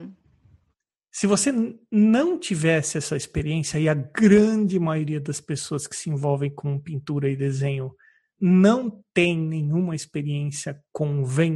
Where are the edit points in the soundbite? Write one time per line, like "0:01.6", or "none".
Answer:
none